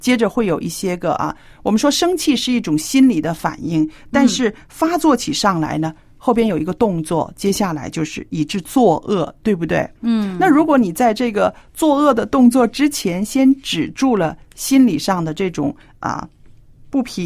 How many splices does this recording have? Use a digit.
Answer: 0